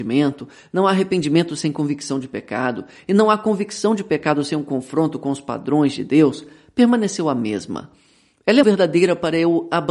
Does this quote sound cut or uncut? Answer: cut